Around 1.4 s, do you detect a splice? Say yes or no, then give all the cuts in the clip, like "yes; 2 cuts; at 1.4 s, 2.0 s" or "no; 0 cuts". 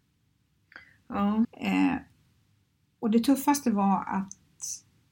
yes; 1 cut; at 1.4 s